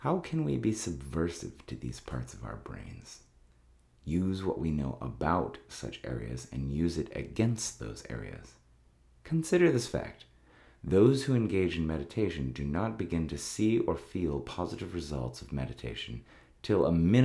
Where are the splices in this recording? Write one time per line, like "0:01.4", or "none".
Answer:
none

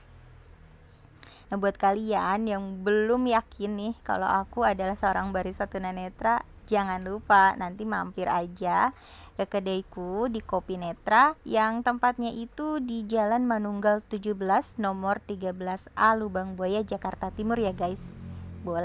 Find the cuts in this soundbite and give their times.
0:01.5
0:11.4

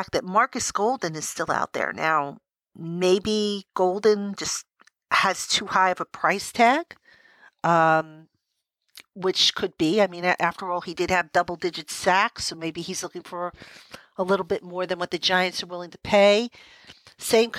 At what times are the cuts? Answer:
none

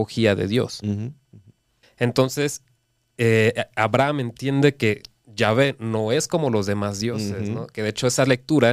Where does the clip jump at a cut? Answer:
0:01.8

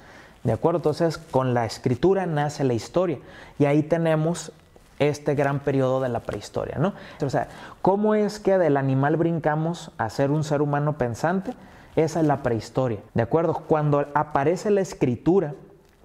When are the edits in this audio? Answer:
0:07.2
0:13.1

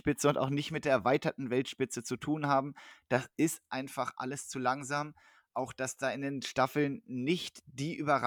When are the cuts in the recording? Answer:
none

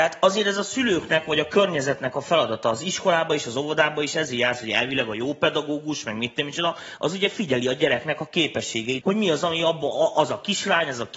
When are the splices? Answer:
0:09.0

